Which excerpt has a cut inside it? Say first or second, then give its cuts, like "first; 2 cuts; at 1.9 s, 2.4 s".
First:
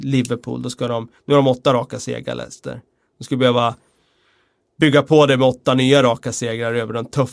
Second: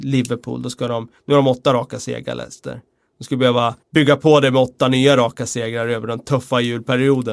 second; 1 cut; at 3.8 s